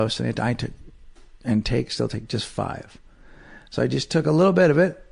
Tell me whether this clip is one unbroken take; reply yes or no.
yes